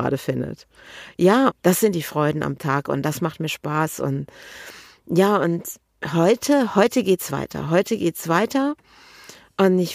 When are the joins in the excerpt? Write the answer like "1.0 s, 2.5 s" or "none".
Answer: 1.5 s